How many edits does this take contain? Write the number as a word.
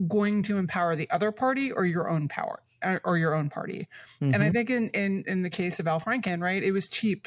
zero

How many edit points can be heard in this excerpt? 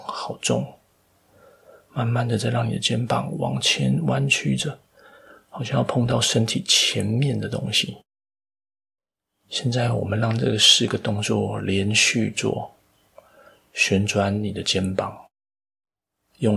zero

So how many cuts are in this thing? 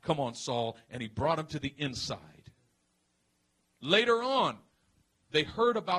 zero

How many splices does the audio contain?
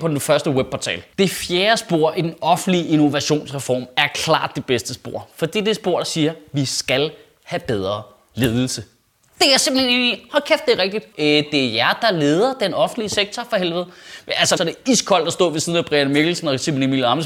two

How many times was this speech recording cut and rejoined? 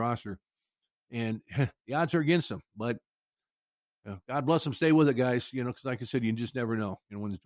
zero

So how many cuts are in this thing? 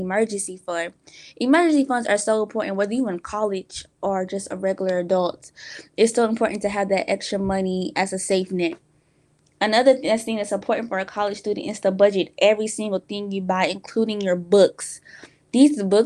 zero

